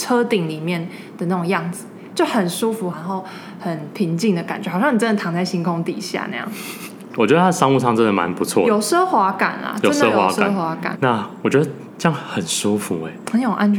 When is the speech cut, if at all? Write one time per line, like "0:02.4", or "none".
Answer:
0:02.9
0:07.1
0:10.9